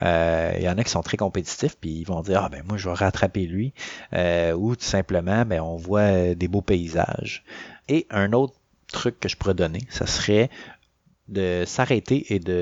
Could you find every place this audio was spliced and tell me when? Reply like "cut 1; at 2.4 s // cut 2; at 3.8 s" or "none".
none